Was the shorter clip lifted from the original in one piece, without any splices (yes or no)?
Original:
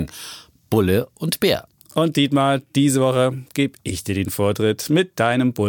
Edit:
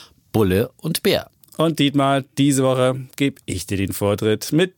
yes